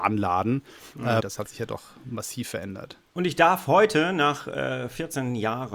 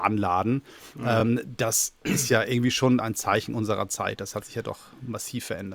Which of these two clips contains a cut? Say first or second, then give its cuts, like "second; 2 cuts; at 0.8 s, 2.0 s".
first; 1 cut; at 1.2 s